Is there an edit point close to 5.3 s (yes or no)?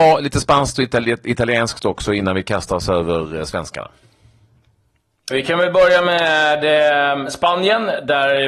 yes